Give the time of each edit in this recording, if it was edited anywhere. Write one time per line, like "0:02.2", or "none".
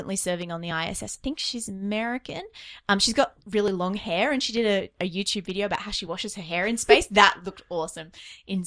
none